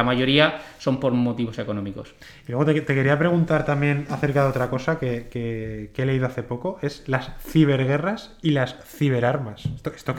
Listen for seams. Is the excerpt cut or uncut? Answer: uncut